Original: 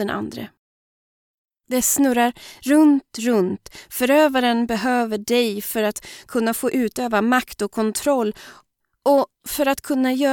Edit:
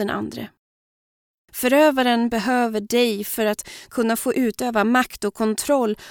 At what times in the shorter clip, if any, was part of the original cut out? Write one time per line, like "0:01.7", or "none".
0:01.5

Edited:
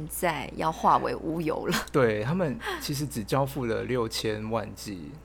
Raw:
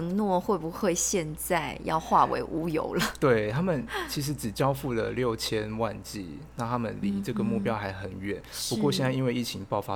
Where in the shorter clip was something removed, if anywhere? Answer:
none

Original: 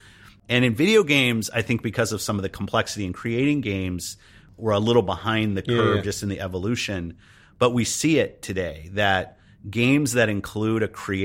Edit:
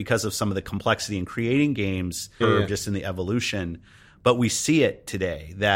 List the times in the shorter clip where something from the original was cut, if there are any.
0:02.4

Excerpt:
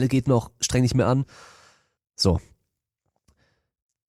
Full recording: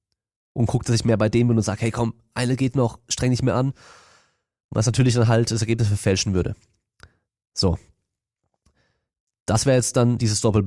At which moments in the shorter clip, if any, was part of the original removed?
0:02.0

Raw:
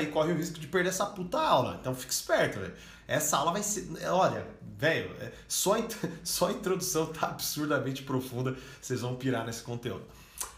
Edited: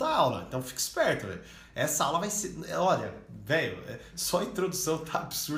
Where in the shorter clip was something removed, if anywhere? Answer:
0:04.1

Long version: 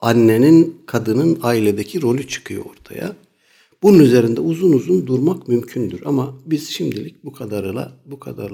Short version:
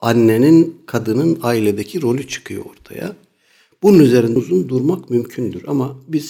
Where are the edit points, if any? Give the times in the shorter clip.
0:04.4

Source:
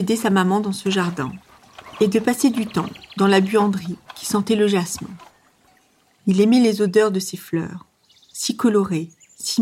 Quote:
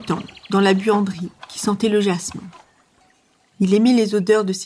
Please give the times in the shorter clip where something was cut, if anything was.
none

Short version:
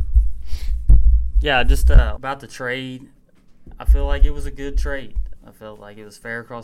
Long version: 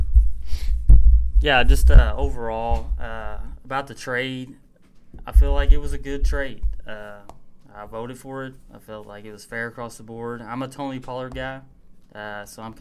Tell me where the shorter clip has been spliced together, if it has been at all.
0:02.2
0:05.4

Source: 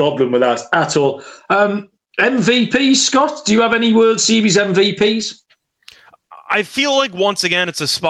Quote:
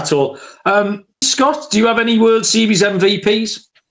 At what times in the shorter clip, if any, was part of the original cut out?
0:01.2

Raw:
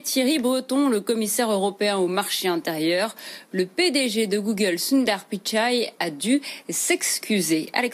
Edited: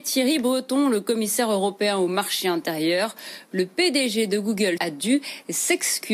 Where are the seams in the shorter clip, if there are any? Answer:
0:04.8

